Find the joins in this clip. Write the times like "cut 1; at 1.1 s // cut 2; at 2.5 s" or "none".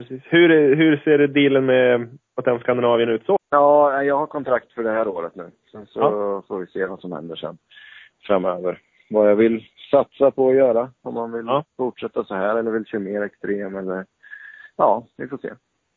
cut 1; at 3.4 s

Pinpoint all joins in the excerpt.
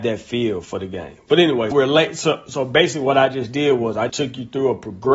cut 1; at 1.7 s // cut 2; at 4.1 s

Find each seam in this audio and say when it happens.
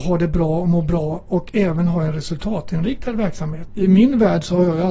cut 1; at 3.7 s

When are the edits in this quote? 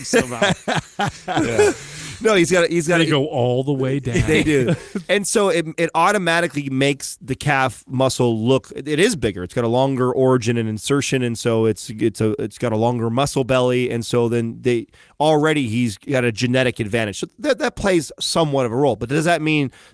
none

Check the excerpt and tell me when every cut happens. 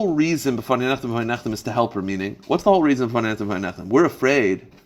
none

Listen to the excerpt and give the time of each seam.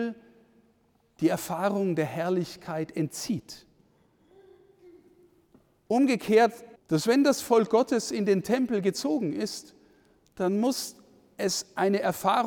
cut 1; at 6.8 s

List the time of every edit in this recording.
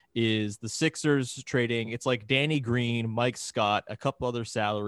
none

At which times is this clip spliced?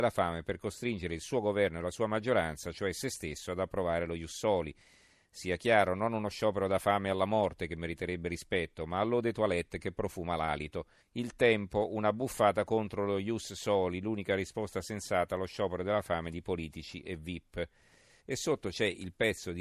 cut 1; at 11.0 s // cut 2; at 18.2 s

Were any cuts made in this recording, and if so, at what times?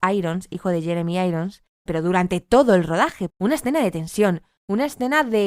cut 1; at 1.9 s // cut 2; at 3.3 s

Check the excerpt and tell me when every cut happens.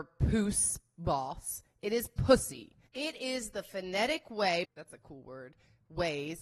cut 1; at 2.9 s // cut 2; at 4.6 s

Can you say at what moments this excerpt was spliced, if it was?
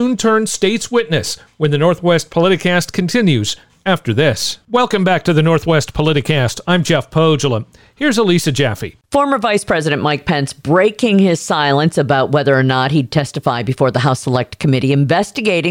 none

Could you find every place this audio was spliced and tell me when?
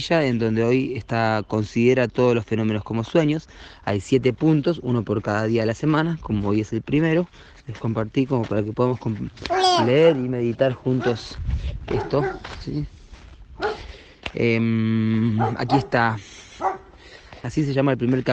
cut 1; at 17.4 s

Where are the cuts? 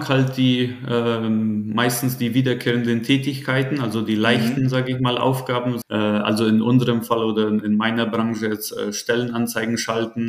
cut 1; at 5.8 s

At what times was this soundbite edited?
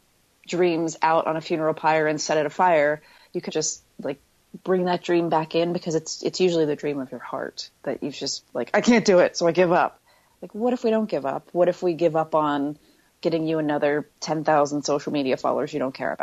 cut 1; at 3.5 s

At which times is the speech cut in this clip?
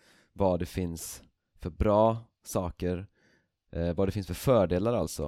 none

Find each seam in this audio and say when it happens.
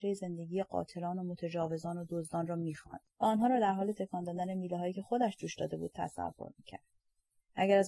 cut 1; at 3.1 s

